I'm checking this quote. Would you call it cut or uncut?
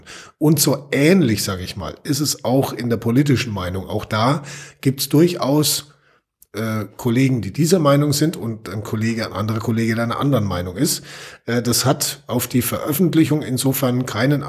uncut